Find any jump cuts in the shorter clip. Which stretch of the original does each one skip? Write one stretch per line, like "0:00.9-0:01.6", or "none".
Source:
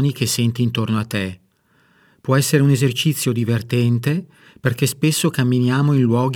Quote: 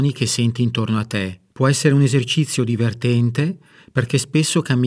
0:01.5-0:02.2